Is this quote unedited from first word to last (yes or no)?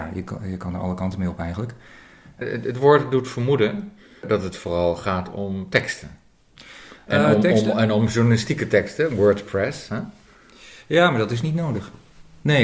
yes